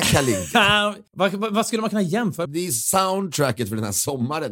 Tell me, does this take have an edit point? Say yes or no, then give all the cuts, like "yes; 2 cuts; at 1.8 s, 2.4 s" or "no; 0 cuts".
yes; 2 cuts; at 1.1 s, 2.5 s